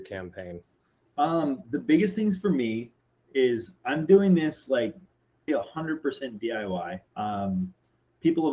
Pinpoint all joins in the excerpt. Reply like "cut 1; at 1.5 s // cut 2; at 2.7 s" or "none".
cut 1; at 5.5 s // cut 2; at 7.1 s